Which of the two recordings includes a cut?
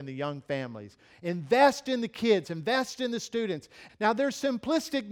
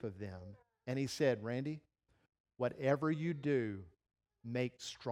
first; 2 cuts; at 2.4 s, 3.9 s

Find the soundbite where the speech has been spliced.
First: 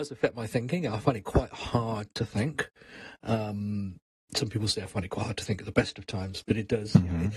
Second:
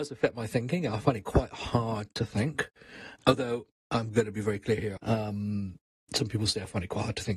second; 2 cuts; at 3.2 s, 5.0 s

